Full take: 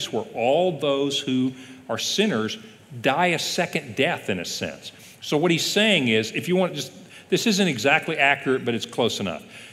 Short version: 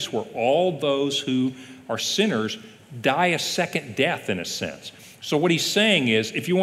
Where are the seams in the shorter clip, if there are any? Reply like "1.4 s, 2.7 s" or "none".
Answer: none